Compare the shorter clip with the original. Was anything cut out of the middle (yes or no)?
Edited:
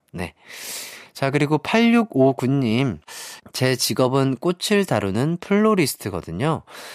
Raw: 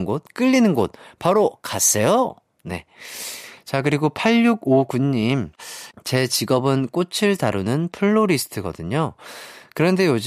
no